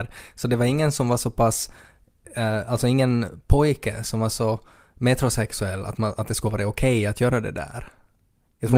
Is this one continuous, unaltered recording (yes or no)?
yes